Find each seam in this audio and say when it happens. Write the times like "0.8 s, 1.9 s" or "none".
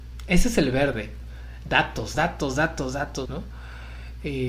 2.1 s, 3.3 s